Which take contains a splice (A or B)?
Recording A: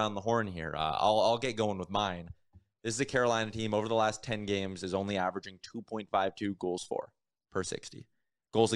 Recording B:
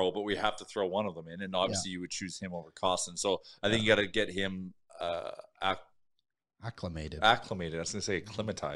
B